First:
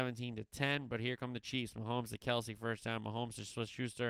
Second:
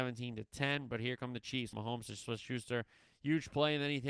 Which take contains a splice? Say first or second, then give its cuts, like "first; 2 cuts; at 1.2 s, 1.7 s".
second; 1 cut; at 1.7 s